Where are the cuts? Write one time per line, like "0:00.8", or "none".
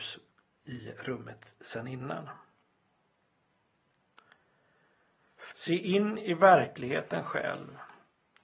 0:05.5